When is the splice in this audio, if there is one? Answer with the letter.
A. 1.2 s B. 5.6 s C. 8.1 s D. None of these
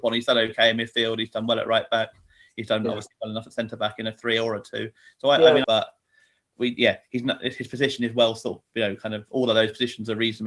B